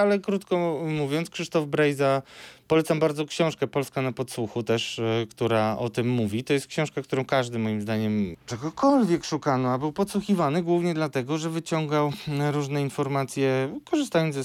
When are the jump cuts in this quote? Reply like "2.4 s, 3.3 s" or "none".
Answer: 8.3 s